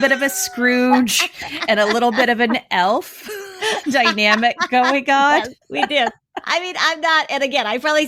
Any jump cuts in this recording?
yes; 1 cut; at 5.6 s

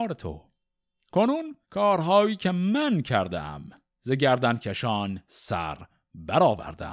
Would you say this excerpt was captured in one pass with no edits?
no; 1 cut; at 1.6 s

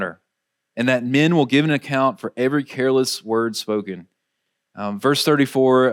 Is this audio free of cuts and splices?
yes; 0 cuts

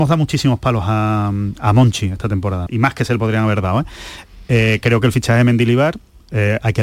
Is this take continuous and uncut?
no; 1 cut; at 2.7 s

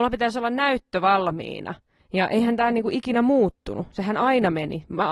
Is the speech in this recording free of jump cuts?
no; 1 cut; at 2.0 s

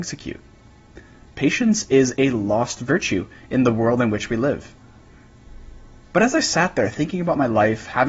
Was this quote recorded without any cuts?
no; 1 cut; at 1.3 s

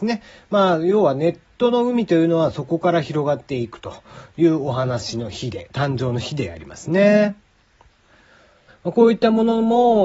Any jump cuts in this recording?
yes; 1 cut; at 8.7 s

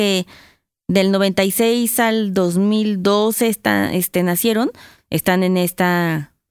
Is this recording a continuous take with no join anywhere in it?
yes; 0 cuts

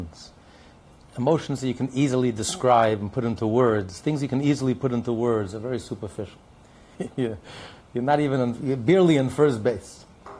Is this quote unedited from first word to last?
no; 1 cut; at 7.0 s

